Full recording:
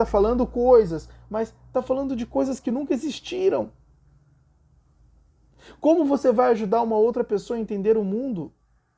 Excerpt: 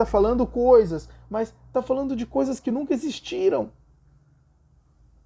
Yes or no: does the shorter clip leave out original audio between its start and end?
no